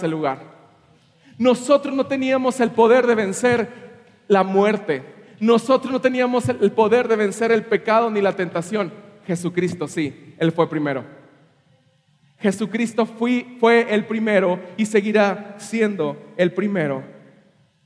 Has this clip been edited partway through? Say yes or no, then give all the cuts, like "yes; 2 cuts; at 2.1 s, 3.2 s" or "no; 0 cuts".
no; 0 cuts